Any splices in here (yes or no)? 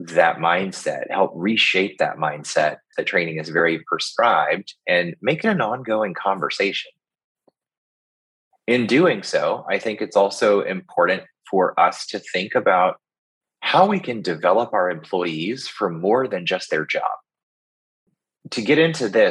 yes